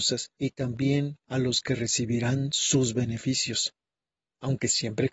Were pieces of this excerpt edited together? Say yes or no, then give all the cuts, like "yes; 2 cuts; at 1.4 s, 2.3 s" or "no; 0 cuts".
no; 0 cuts